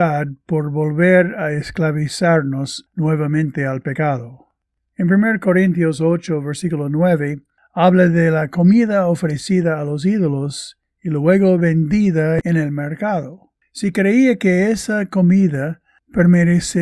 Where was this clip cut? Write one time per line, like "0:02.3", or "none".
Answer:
none